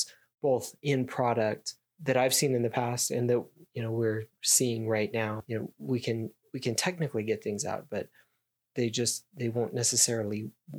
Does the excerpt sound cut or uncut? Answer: uncut